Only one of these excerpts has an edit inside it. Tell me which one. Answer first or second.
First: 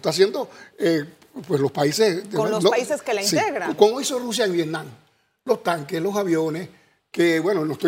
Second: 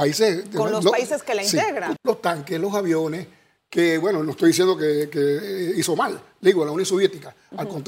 second